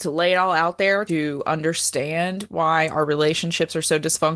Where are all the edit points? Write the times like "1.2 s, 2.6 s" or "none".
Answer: 1.1 s

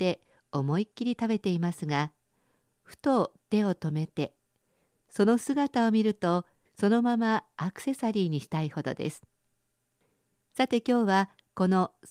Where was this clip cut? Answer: 6.7 s

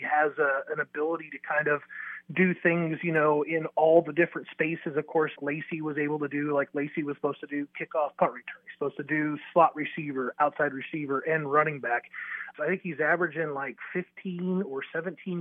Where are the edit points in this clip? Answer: 5.4 s, 12.5 s

